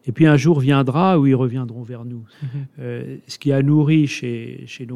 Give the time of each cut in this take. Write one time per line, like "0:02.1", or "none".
0:02.3